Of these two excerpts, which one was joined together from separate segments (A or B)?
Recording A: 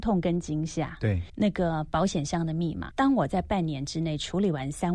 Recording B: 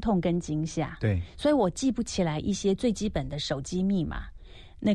A